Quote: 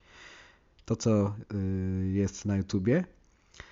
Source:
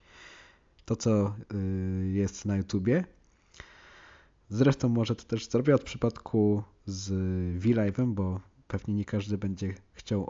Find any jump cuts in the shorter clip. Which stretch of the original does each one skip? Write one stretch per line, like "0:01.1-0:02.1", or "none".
none